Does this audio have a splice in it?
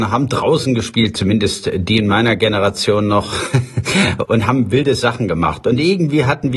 no; 0 cuts

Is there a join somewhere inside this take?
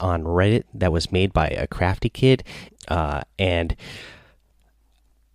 yes; 1 cut; at 2.7 s

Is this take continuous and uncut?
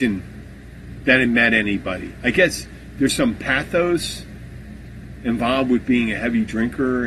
yes; 0 cuts

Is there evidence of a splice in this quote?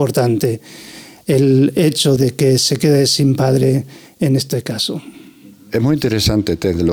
yes; 1 cut; at 2.2 s

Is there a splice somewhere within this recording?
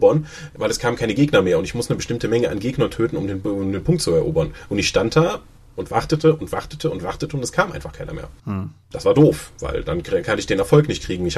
no; 0 cuts

